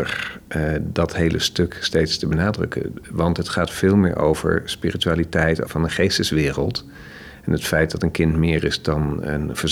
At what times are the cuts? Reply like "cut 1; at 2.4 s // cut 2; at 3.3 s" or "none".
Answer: cut 1; at 5.7 s